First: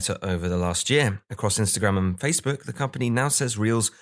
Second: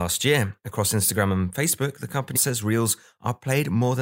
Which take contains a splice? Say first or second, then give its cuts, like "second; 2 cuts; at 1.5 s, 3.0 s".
second; 1 cut; at 2.4 s